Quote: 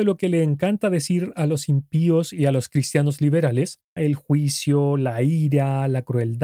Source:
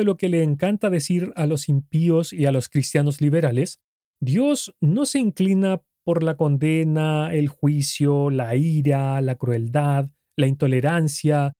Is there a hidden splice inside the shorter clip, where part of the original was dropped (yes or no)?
yes